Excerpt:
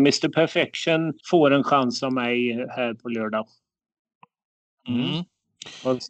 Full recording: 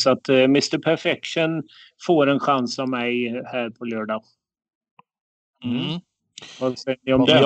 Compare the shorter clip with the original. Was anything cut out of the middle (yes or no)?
yes